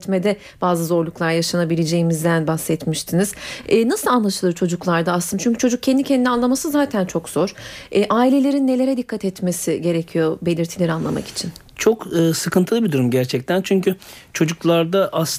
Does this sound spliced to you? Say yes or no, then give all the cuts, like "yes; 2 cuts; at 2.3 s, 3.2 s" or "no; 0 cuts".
no; 0 cuts